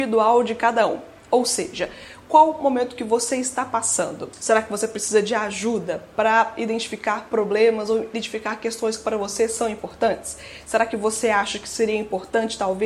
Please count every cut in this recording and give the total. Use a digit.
0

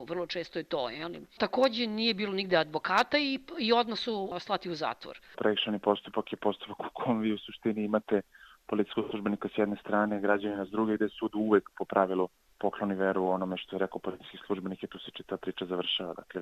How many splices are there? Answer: 1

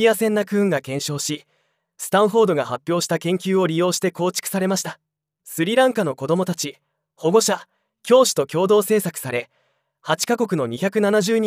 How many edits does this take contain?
0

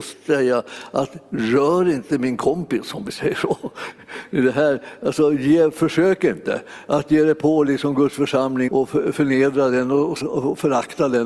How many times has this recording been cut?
2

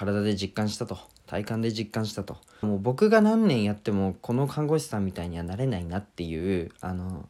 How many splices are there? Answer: 1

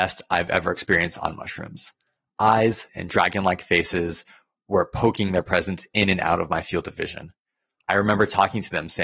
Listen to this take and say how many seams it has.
1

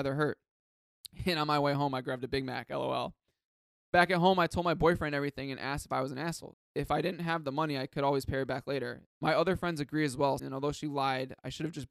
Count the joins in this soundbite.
3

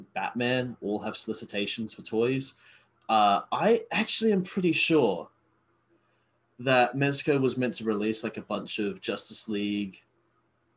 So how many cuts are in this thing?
0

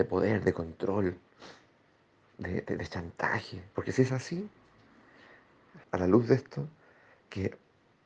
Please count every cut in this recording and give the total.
2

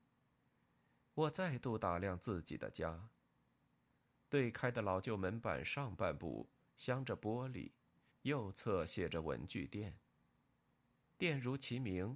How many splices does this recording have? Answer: 2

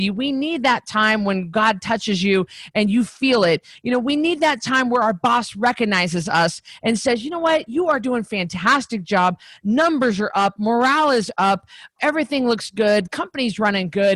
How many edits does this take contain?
0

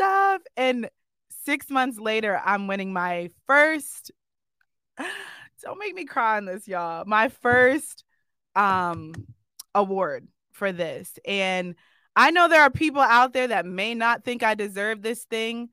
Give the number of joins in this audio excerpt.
0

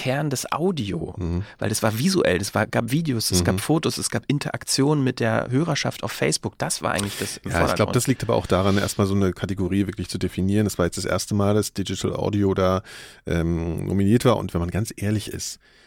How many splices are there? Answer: 0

